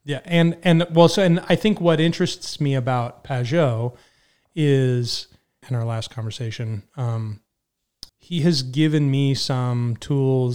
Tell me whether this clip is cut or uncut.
cut